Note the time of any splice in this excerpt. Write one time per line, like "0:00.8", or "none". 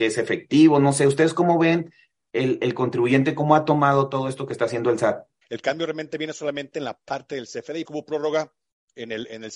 0:05.4
0:07.8

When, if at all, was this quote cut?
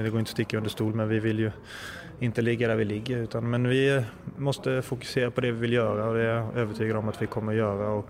none

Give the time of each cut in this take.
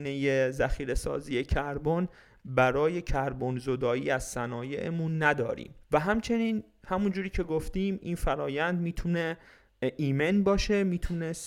0:05.8

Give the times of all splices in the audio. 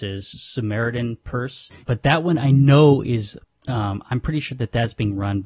0:01.8

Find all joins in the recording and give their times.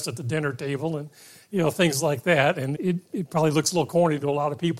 0:02.7

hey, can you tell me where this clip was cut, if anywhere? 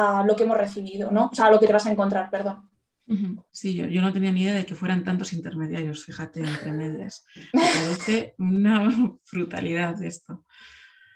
0:03.5

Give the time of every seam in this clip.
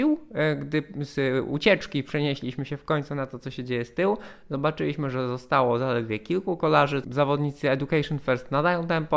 0:07.0

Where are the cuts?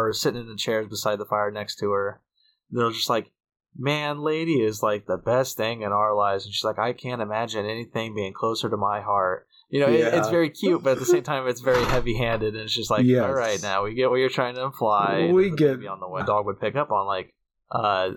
0:16.2

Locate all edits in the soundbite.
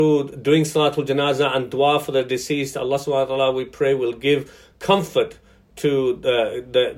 none

